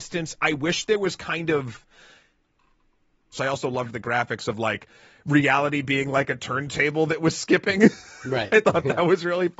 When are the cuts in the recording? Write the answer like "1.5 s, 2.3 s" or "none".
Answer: 3.3 s